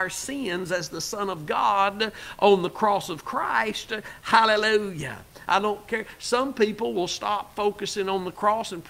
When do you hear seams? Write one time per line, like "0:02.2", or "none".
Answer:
0:05.5